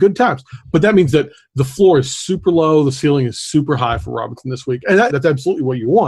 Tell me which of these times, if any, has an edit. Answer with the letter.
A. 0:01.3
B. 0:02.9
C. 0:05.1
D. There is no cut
C